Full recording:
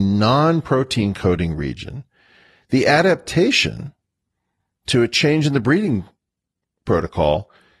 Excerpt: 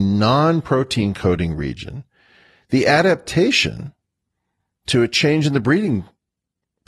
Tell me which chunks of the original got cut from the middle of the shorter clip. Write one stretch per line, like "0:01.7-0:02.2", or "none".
none

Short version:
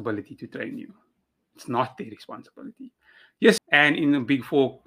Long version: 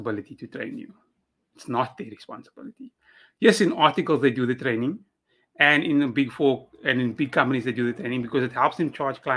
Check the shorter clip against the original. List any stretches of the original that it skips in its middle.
0:03.6-0:05.5

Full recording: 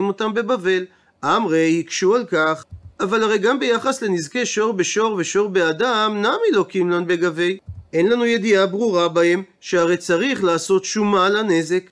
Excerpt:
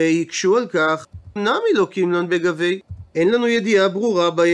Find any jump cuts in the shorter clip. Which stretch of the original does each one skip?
0:02.9-0:06.1

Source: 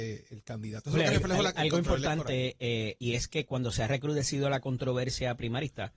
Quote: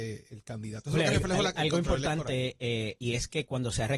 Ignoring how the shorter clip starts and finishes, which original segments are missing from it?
none

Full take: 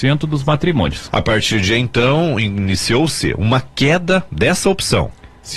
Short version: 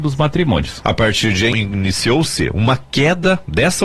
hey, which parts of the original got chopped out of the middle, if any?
0:01.8-0:02.3

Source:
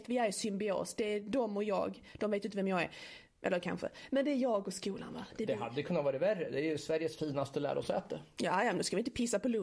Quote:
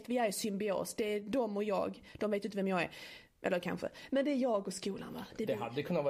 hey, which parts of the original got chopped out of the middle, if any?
none

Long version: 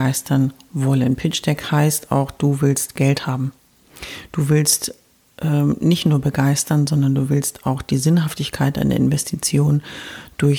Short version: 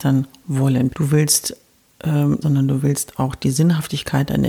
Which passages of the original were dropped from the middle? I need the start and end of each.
0:01.2-0:04.3
0:05.8-0:06.9

